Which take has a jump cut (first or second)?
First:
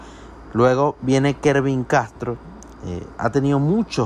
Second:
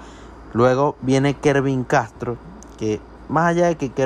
first